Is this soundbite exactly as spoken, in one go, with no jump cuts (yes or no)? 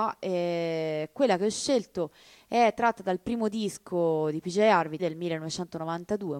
no